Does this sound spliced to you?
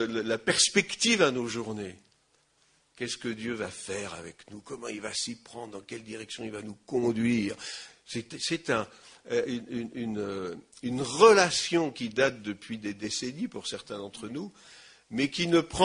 no; 0 cuts

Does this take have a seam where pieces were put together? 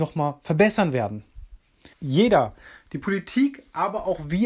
yes; 1 cut; at 1.9 s

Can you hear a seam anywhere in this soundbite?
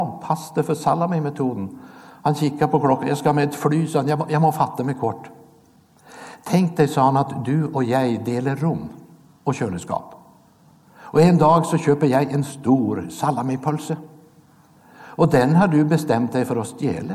no; 0 cuts

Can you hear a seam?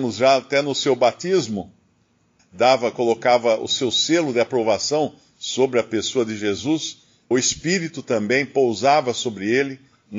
yes; 2 cuts; at 2.4 s, 7.3 s

